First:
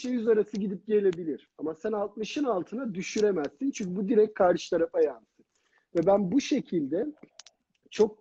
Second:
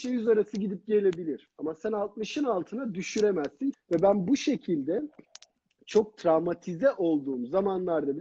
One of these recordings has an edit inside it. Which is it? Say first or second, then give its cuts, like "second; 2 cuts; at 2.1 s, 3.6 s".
second; 1 cut; at 3.7 s